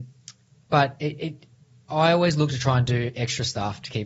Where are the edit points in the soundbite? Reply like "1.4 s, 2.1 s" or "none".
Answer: none